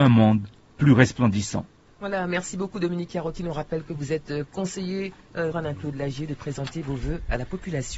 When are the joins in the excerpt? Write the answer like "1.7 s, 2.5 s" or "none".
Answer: 1.9 s, 5.5 s